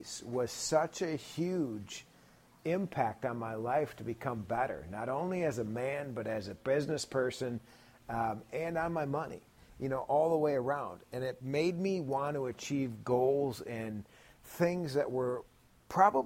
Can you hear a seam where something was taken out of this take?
no; 0 cuts

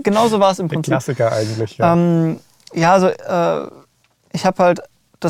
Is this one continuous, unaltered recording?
yes; 0 cuts

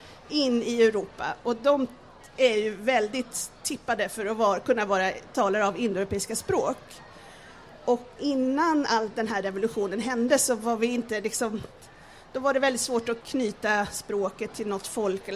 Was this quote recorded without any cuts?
yes; 0 cuts

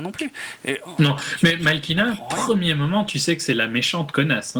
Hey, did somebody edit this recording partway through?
no; 0 cuts

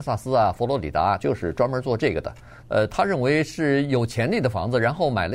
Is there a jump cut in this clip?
yes; 2 cuts; at 1.2 s, 2.6 s

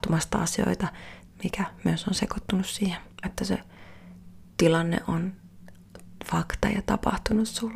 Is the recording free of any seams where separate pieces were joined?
no; 2 cuts; at 1.3 s, 3.2 s

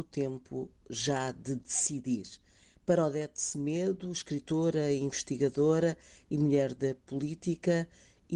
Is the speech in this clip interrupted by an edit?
no; 0 cuts

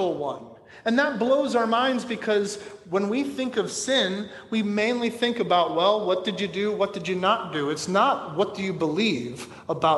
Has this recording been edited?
no; 0 cuts

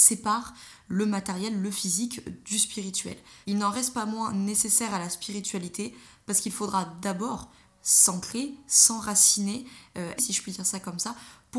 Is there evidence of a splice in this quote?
yes; 2 cuts; at 3.4 s, 10.2 s

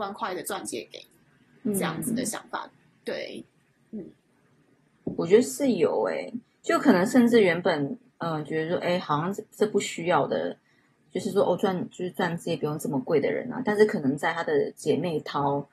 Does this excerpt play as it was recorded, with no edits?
yes; 0 cuts

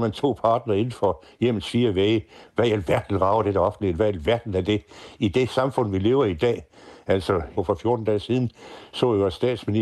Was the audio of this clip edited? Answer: yes; 1 cut; at 7.6 s

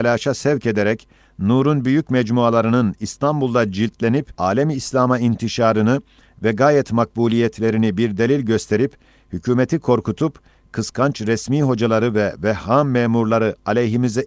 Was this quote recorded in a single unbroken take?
no; 1 cut; at 4.3 s

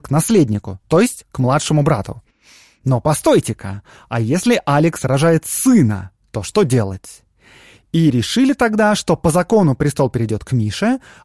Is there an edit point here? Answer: no; 0 cuts

